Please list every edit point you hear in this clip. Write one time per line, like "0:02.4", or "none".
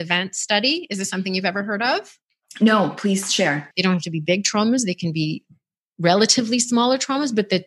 0:03.7